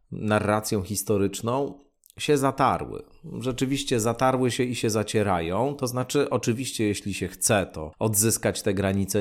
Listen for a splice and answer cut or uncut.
uncut